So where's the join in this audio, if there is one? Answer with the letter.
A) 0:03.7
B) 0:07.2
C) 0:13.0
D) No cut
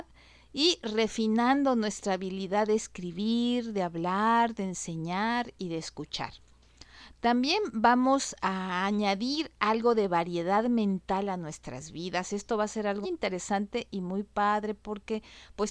C